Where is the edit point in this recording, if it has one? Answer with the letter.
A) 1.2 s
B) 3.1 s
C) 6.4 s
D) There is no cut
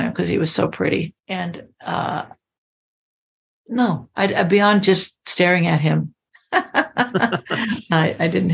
A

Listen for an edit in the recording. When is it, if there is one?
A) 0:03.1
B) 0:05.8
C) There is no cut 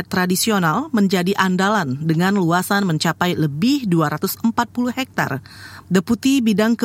B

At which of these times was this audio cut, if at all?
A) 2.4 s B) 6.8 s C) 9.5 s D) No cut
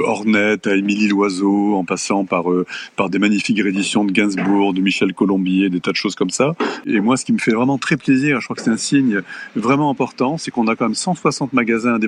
D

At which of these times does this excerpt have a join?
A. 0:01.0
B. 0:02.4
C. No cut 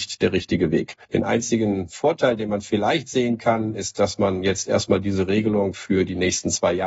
A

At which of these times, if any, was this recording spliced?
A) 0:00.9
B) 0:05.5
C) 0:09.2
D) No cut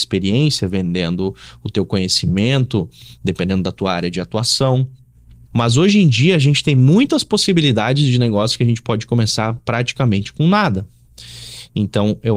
B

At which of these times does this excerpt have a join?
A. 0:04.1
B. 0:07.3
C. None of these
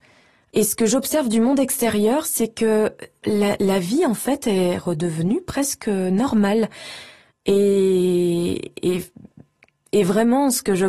B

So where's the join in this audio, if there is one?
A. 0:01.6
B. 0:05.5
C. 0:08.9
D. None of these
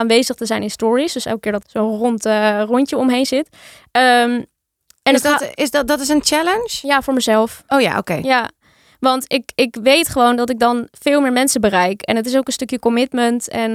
A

